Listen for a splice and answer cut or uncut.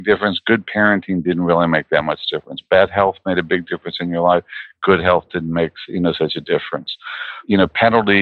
uncut